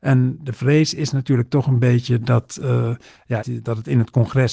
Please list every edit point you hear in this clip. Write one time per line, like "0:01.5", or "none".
0:03.4